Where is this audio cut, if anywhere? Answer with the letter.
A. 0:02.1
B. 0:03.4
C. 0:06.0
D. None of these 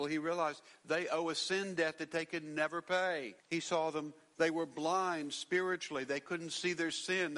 B